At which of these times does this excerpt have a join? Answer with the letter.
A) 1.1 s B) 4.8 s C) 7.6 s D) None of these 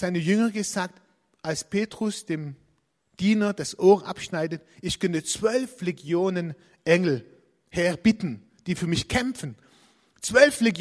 D